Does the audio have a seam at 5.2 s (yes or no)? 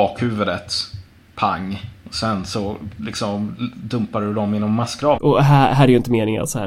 yes